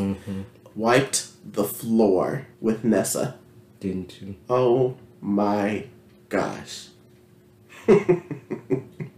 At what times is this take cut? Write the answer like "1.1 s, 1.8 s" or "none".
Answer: 2.5 s

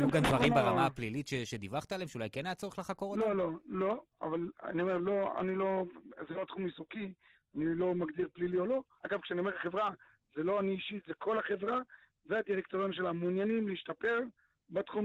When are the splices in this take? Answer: 9.0 s

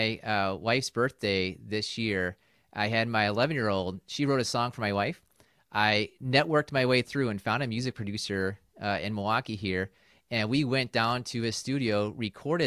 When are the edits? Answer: none

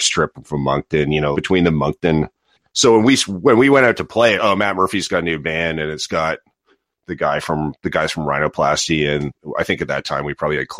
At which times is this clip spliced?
1.3 s, 4.4 s

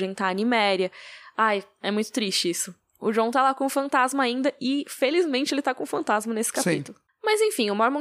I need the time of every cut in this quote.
none

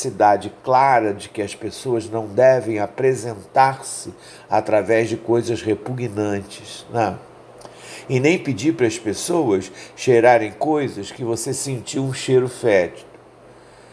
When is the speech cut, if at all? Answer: none

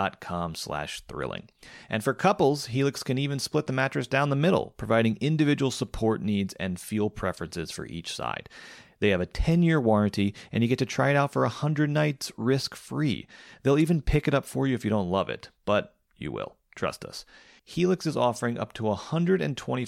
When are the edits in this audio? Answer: none

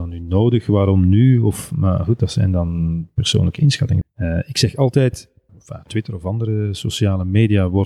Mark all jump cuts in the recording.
4.0 s, 5.5 s

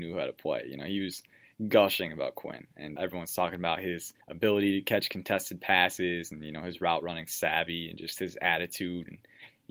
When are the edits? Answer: 3.0 s, 4.2 s

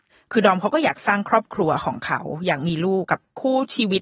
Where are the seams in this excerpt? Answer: 3.0 s

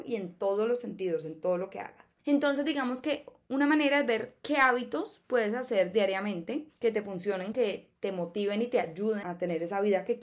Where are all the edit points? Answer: 7.5 s, 9.2 s

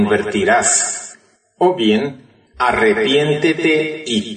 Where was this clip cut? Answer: none

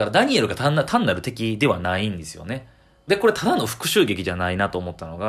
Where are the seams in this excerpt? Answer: 3.1 s

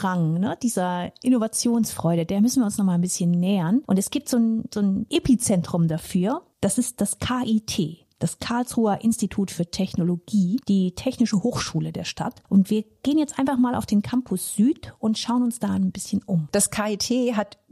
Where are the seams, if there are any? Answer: none

